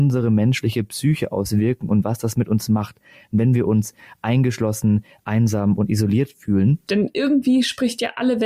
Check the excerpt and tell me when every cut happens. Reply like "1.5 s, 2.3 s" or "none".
6.9 s